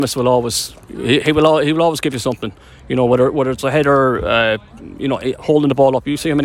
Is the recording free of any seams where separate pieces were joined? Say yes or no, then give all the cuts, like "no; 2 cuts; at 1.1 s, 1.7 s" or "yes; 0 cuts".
yes; 0 cuts